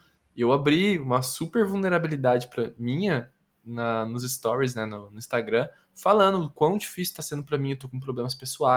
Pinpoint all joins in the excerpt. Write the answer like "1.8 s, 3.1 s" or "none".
none